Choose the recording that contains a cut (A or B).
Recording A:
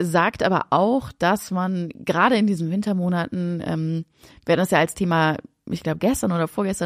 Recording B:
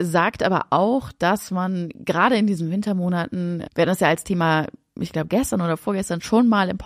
B